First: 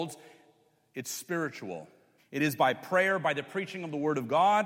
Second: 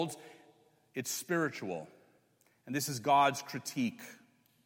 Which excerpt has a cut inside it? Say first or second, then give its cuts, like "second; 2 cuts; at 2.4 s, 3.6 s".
first; 1 cut; at 2.2 s